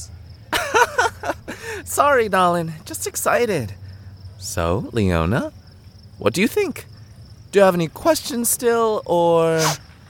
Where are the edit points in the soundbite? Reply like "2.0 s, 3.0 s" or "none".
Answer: none